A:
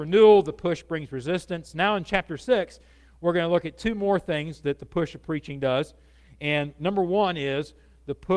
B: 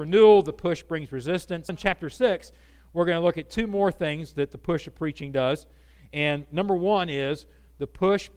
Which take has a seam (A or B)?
B